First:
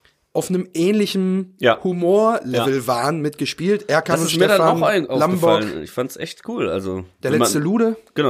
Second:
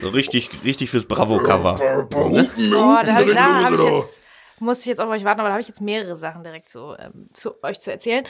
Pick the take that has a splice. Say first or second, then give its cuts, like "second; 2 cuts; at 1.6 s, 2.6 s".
second; 1 cut; at 3.3 s